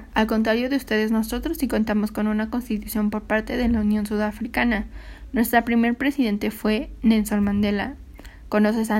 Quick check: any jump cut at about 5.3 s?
no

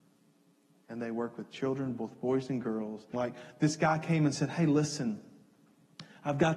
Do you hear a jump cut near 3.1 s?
yes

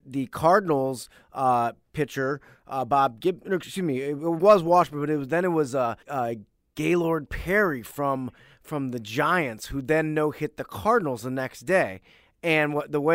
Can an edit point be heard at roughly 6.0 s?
yes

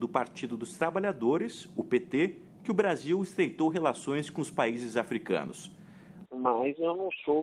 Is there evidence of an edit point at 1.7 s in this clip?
no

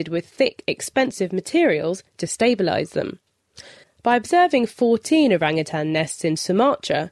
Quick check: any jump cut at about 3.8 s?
yes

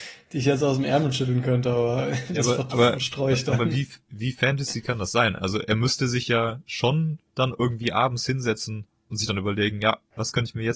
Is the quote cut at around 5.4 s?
no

